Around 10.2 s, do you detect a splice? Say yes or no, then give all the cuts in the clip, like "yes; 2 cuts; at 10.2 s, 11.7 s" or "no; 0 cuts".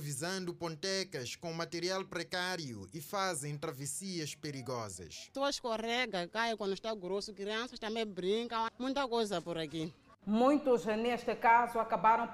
yes; 2 cuts; at 8.7 s, 10.2 s